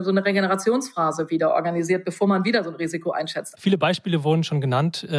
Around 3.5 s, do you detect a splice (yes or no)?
yes